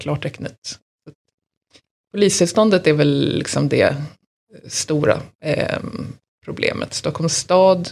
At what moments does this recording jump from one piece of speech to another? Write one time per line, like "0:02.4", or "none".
none